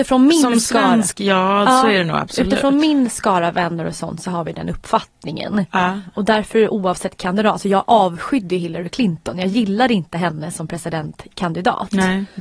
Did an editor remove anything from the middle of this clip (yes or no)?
no